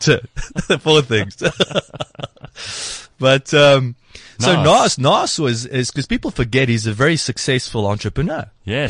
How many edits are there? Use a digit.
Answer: 0